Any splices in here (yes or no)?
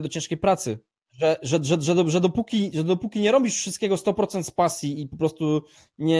yes